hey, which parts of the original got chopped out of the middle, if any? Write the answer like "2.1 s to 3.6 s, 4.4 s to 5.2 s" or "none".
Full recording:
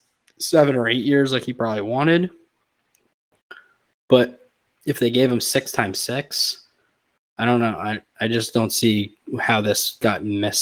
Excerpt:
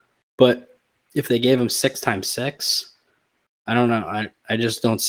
none